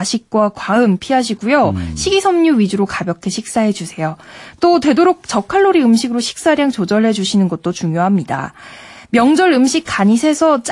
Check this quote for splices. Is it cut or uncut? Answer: uncut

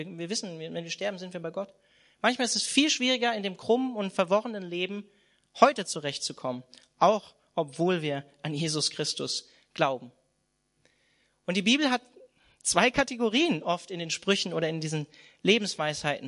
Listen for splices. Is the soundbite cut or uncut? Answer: uncut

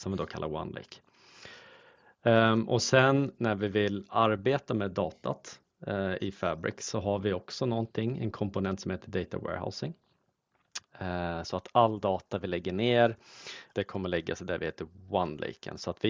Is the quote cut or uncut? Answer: cut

